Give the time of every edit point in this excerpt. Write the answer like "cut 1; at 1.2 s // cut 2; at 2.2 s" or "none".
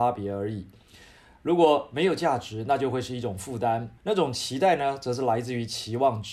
cut 1; at 4.0 s